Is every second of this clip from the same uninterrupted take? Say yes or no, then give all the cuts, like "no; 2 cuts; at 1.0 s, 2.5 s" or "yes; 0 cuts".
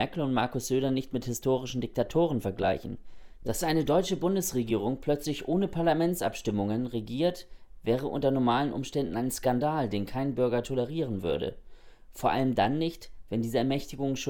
no; 1 cut; at 3.4 s